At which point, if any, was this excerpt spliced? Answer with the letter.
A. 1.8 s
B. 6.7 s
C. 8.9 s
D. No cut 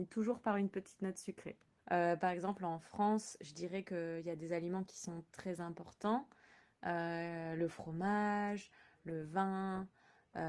A